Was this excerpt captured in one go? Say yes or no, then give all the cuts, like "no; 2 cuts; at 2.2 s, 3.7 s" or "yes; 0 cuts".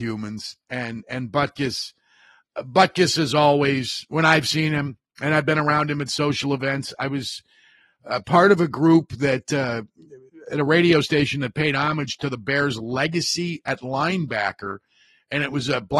yes; 0 cuts